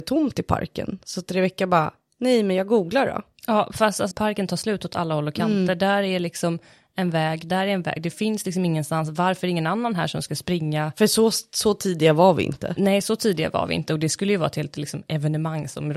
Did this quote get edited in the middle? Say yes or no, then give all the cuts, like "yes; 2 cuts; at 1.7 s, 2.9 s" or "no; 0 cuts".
yes; 1 cut; at 4.1 s